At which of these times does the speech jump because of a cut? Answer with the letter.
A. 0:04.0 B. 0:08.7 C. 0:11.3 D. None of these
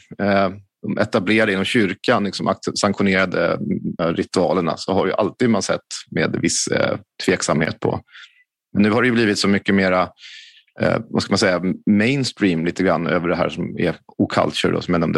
A